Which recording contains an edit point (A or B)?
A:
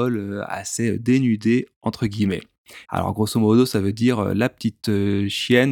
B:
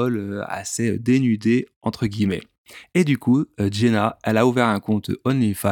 A